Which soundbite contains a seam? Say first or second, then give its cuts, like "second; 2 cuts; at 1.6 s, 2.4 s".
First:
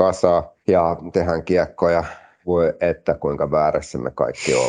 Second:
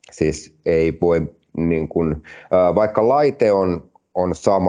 first; 1 cut; at 1.1 s